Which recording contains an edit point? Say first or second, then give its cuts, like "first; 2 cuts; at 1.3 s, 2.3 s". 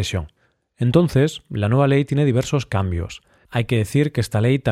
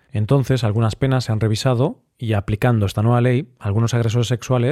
first; 1 cut; at 3.4 s